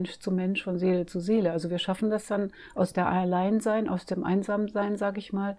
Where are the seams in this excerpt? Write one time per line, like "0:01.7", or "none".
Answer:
none